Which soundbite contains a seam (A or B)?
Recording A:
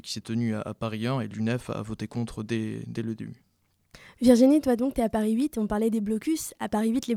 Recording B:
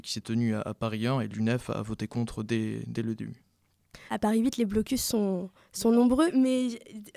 B